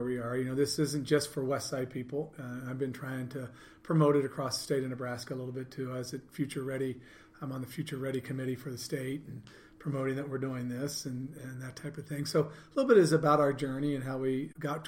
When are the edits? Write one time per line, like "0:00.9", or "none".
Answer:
none